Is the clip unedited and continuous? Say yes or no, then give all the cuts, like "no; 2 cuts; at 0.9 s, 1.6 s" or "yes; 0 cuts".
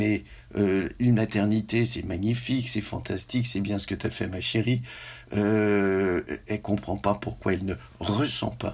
yes; 0 cuts